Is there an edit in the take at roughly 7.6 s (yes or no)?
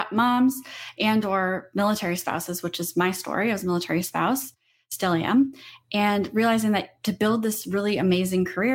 no